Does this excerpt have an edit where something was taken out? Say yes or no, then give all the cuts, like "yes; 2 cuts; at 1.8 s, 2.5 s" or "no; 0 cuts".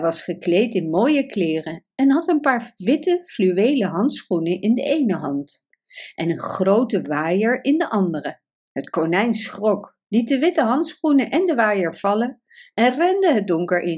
yes; 1 cut; at 8.5 s